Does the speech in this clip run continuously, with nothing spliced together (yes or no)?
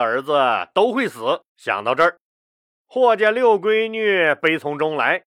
no